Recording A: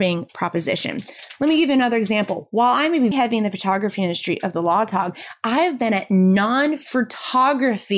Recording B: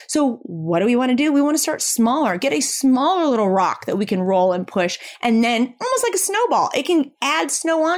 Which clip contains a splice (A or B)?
A